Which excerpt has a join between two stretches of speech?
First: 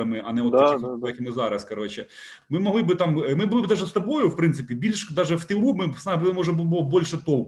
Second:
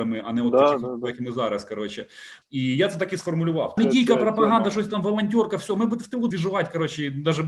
second; 3 cuts; at 2.4 s, 3.8 s, 6.3 s

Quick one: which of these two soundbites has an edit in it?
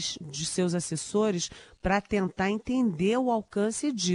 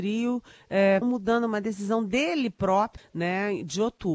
second; 2 cuts; at 1.0 s, 3.0 s

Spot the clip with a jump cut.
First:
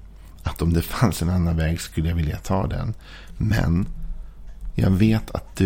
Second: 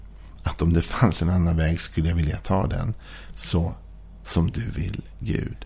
second; 1 cut; at 3.3 s

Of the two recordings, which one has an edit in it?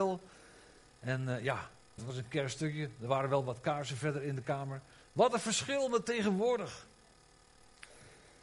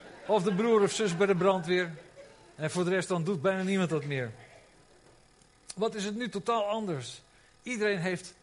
first; 2 cuts; at 2.0 s, 5.0 s

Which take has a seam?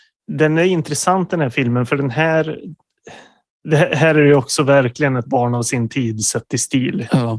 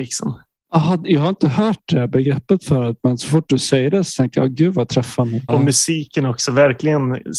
second; 1 cut; at 5.5 s

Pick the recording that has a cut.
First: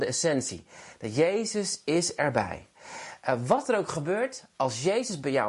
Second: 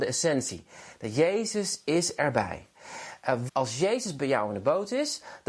second; 1 cut; at 3.5 s

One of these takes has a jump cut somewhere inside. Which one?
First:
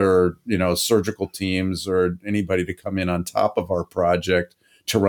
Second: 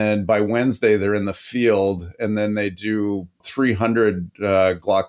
second; 1 cut; at 3.4 s

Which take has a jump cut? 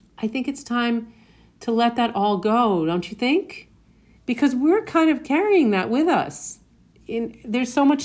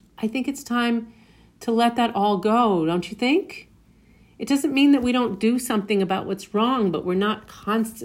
first; 1 cut; at 4.2 s

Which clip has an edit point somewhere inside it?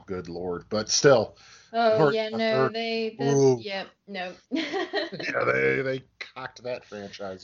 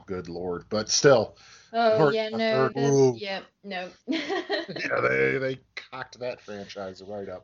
second; 1 cut; at 2.7 s

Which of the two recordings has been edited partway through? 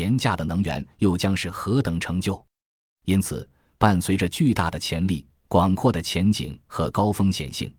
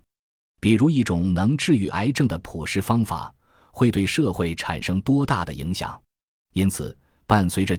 second; 1 cut; at 6.3 s

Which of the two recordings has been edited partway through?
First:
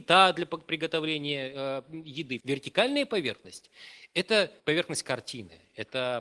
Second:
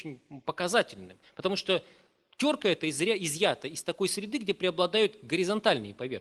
first; 2 cuts; at 2.4 s, 4.6 s

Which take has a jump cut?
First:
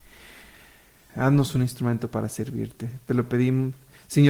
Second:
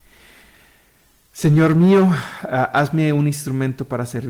first; 1 cut; at 1.1 s

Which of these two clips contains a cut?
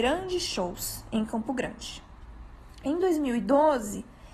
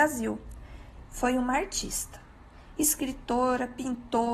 second; 1 cut; at 1.0 s

